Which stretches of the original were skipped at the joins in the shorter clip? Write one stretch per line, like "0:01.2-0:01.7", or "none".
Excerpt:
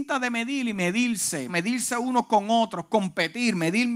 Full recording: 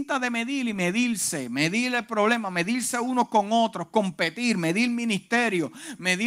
0:01.5-0:02.5

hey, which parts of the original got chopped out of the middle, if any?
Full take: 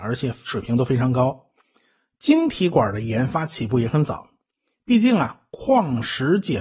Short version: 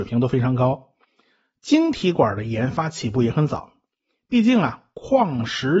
none

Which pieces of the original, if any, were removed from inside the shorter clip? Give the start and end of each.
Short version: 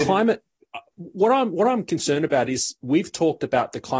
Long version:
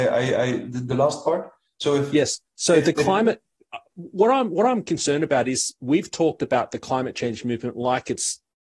none

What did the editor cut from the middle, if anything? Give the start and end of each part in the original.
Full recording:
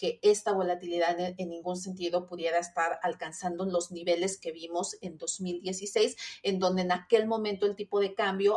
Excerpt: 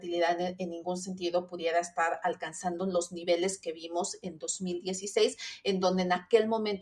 none

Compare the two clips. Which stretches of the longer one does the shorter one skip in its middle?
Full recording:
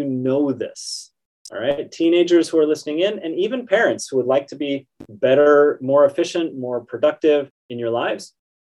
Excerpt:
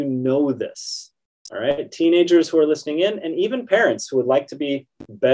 none

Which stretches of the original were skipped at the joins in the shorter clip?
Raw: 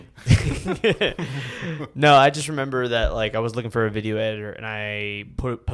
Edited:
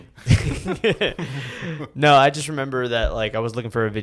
none

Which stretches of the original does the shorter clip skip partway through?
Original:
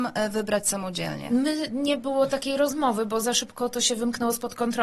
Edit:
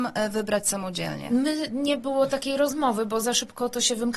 none

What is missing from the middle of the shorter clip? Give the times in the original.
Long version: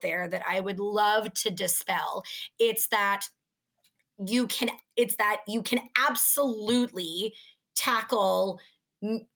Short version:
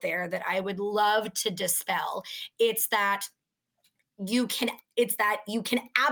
none

